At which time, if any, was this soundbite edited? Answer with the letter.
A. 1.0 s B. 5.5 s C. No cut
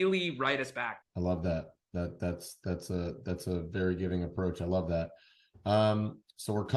A